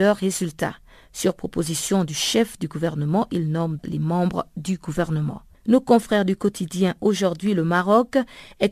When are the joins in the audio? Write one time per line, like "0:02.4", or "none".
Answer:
0:03.8